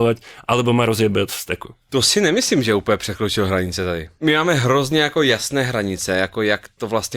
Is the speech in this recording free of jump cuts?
yes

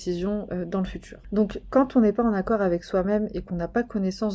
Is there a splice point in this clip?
no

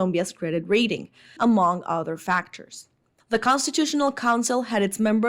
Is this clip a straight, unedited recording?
no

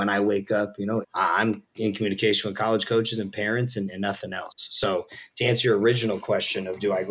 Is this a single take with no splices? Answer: no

